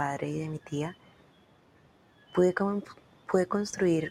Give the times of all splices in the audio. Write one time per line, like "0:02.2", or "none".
none